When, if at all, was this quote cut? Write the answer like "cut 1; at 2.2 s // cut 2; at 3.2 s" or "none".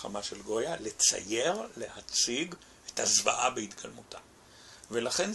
none